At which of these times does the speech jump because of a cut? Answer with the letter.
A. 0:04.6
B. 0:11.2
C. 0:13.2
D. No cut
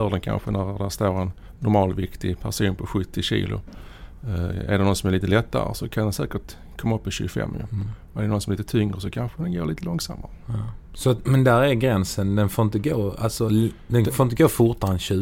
B